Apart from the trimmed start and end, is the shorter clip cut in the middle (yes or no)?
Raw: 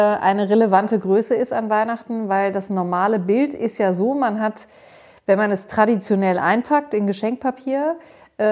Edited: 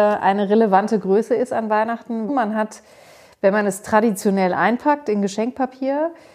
yes